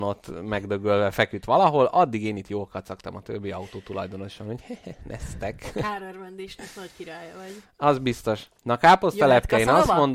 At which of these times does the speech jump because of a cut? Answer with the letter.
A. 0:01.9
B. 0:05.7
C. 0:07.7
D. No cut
D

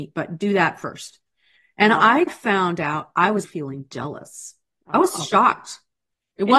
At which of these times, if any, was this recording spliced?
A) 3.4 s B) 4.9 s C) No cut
A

